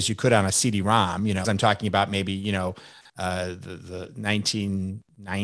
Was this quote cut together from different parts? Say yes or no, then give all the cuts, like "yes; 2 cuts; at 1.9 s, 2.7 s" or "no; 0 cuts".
yes; 1 cut; at 1.4 s